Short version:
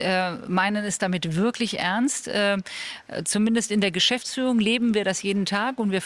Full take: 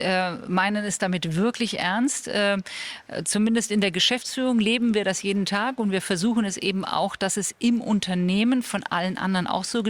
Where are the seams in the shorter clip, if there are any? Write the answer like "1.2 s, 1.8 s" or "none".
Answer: none